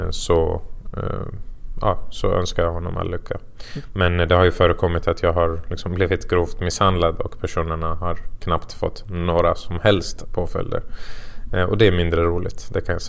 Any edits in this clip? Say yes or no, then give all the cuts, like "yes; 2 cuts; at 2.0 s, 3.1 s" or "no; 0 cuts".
no; 0 cuts